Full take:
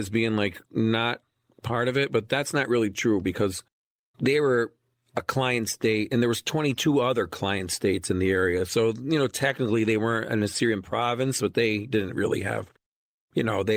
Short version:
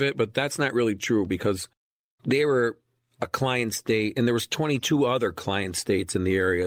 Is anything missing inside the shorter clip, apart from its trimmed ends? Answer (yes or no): no